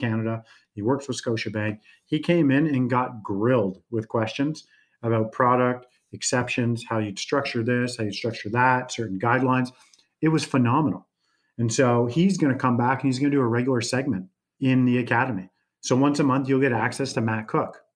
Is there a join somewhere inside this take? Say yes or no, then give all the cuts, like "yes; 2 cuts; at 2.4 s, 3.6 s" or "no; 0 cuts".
no; 0 cuts